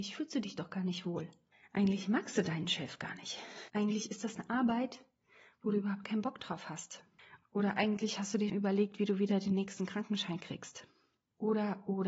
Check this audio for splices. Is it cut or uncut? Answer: cut